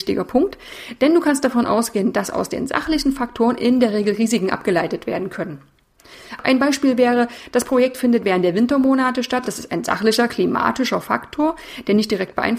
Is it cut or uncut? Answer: uncut